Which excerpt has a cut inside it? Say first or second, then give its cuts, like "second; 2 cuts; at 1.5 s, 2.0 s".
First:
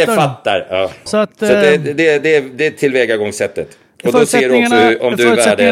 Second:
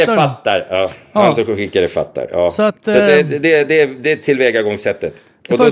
first; 1 cut; at 1.1 s